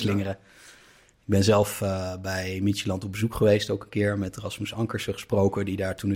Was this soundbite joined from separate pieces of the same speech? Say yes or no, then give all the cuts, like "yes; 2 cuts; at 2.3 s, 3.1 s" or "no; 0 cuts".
no; 0 cuts